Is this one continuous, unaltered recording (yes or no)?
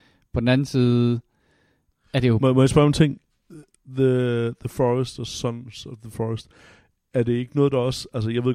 yes